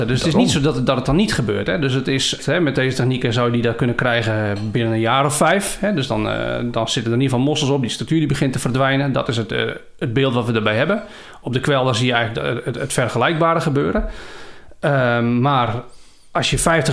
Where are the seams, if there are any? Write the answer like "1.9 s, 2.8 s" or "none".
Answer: 2.4 s